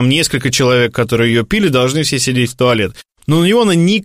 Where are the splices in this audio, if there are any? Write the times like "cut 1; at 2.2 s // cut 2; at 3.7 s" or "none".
none

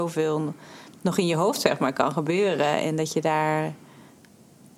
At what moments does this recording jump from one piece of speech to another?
none

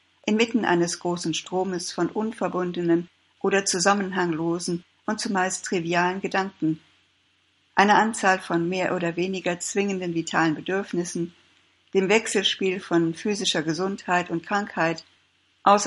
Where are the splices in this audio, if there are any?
none

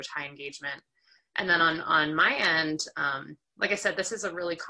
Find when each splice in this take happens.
none

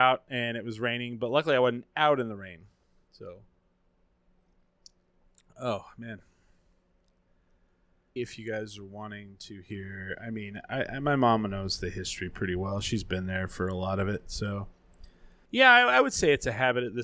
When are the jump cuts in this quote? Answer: cut 1; at 8.2 s // cut 2; at 15.4 s

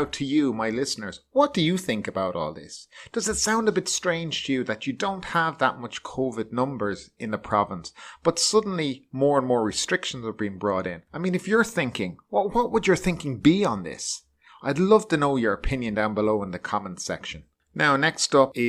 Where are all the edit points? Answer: none

